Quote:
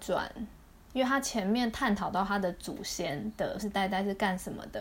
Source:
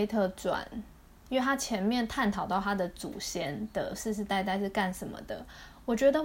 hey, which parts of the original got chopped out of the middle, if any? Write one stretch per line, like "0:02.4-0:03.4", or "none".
0:04.0-0:04.2